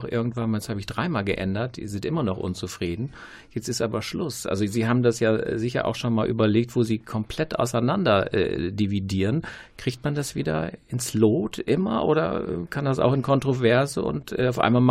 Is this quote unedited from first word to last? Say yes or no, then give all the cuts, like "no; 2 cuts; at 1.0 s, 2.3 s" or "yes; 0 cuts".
yes; 0 cuts